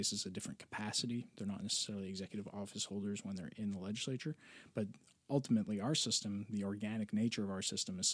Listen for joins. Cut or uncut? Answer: uncut